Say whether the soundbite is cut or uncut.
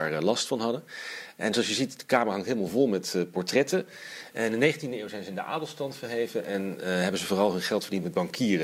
cut